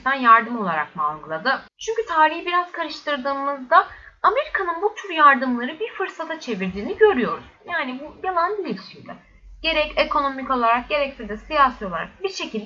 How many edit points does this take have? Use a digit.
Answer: 1